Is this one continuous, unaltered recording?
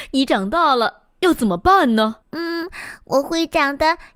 no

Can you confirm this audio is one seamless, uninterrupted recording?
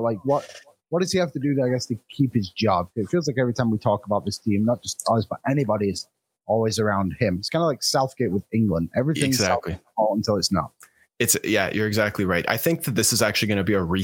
yes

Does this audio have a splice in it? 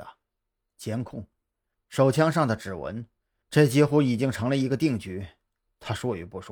yes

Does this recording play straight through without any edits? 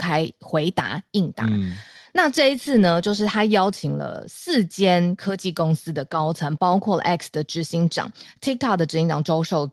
yes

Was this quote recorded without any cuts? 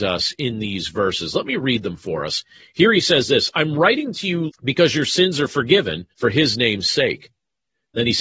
no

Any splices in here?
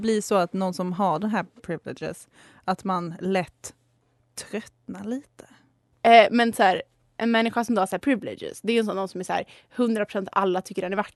yes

